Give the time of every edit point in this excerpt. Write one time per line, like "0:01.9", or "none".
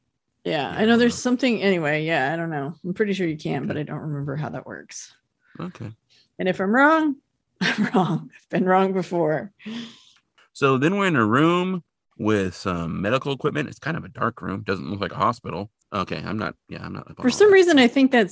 0:15.8